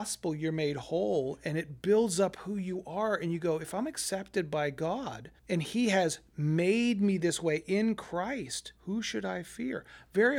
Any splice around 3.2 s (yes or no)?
no